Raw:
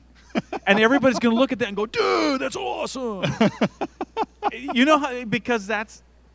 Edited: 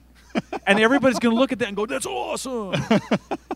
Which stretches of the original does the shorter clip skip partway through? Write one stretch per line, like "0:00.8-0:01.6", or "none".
0:01.9-0:02.4